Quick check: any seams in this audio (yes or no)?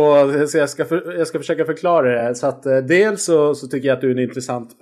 no